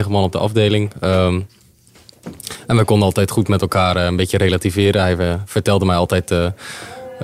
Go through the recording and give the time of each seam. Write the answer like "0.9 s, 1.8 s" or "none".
none